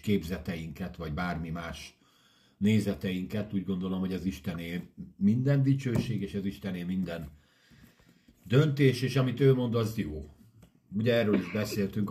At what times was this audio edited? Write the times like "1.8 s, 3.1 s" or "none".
none